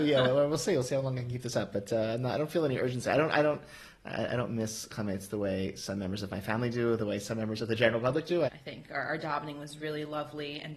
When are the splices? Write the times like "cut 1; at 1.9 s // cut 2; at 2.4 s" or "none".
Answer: cut 1; at 8.5 s // cut 2; at 9.8 s